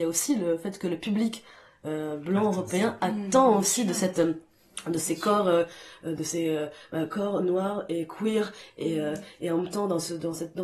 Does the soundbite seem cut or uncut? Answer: uncut